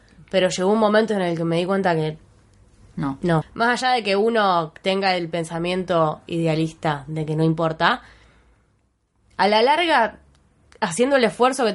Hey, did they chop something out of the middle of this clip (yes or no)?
yes